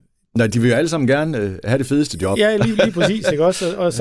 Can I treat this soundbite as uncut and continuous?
yes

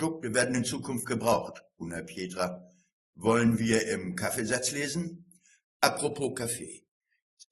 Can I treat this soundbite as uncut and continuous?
yes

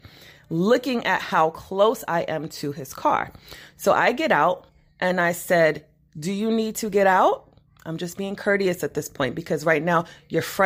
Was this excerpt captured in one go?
yes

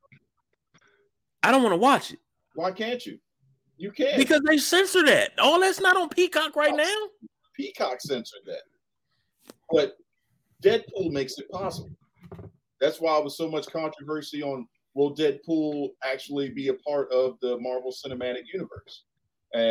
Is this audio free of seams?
yes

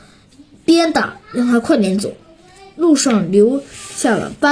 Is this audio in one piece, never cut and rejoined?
yes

